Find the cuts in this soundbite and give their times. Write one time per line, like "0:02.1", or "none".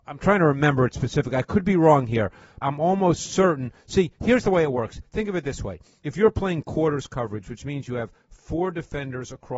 0:02.6